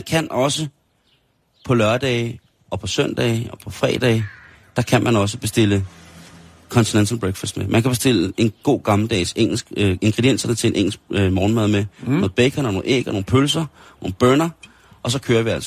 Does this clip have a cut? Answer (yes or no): no